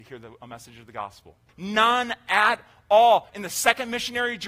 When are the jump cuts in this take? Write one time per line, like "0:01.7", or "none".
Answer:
0:01.5
0:03.3